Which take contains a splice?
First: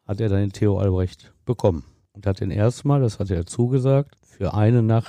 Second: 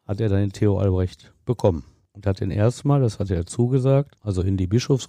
second; 1 cut; at 4.2 s

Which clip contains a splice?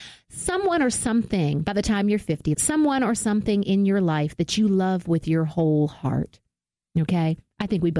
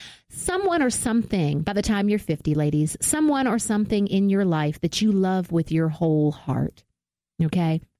first; 1 cut; at 2.5 s

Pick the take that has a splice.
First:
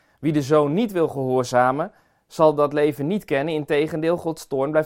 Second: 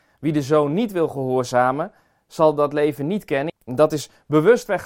second; 1 cut; at 3.5 s

